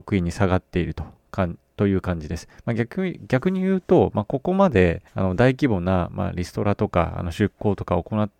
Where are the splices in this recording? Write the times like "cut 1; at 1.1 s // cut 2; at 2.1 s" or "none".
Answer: cut 1; at 2.6 s // cut 2; at 5.1 s